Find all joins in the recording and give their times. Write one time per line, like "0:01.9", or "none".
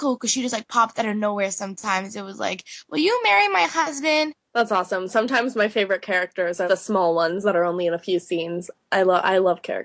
0:04.4
0:06.7

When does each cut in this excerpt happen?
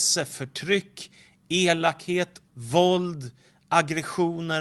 0:02.5

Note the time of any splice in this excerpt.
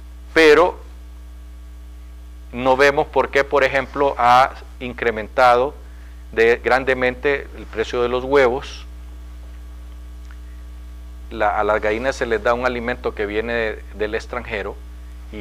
0:06.6
0:11.2

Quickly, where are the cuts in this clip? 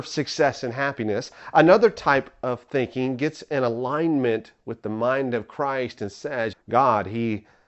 0:06.5

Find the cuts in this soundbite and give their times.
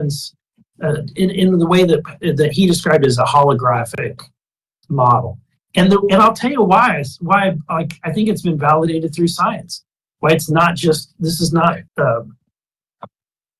0:11.9

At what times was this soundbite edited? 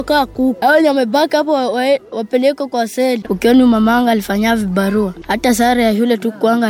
0:03.2

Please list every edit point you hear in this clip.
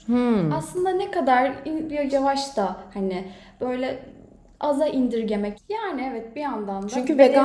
0:02.1
0:05.5

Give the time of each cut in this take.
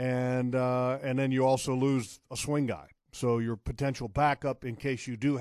none

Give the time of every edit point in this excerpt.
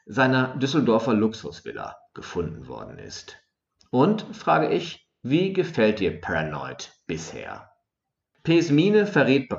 none

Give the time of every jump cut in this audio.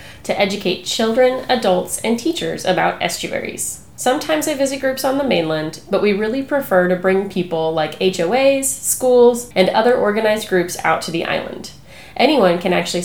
0:09.5

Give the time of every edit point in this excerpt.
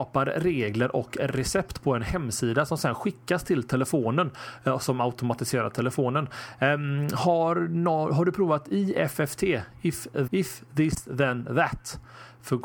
0:10.3

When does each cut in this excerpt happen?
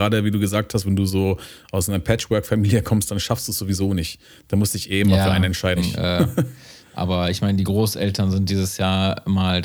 0:05.8

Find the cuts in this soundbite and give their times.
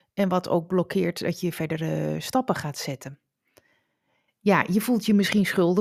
0:04.3

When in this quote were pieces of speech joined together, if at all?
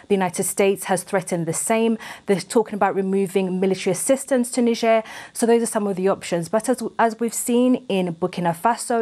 none

